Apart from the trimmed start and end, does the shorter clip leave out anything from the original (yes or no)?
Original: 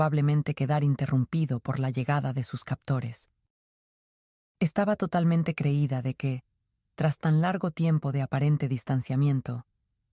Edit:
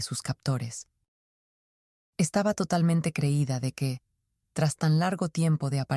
no